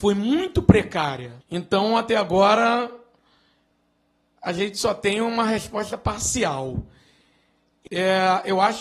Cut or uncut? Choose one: cut